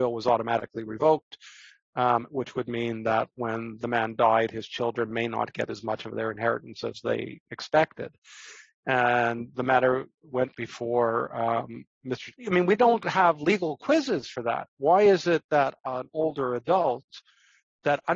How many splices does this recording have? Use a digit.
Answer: 1